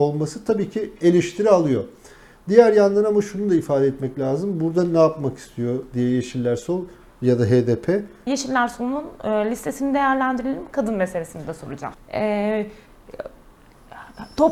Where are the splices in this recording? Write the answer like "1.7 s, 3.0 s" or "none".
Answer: 8.3 s, 11.9 s